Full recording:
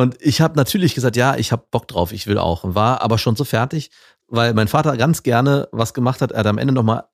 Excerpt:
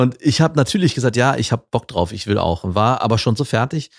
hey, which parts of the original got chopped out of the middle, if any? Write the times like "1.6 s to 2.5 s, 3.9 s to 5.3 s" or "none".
none